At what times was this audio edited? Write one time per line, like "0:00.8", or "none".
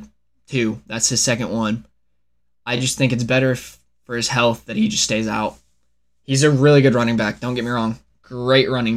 none